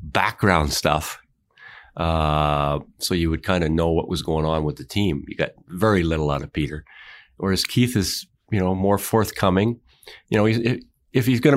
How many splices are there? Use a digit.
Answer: 0